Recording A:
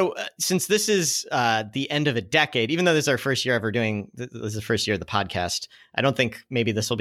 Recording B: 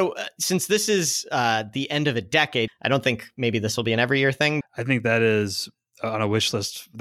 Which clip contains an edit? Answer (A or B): B